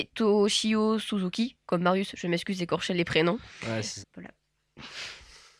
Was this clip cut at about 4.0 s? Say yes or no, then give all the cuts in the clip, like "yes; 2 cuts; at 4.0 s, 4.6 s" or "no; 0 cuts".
yes; 1 cut; at 4.0 s